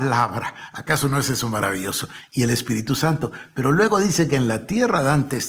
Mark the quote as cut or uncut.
uncut